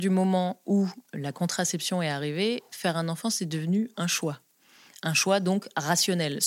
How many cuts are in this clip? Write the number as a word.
zero